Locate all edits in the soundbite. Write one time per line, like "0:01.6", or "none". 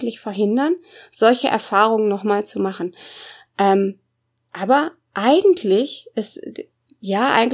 none